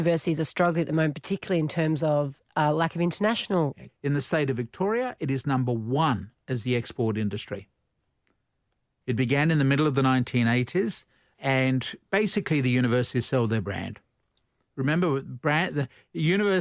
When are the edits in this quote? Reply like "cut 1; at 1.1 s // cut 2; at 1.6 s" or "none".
cut 1; at 3.9 s // cut 2; at 9.0 s